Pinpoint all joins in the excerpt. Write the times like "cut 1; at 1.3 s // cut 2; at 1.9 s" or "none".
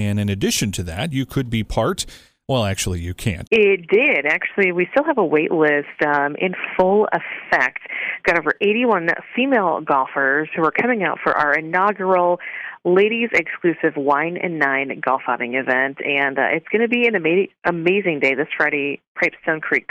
cut 1; at 3.5 s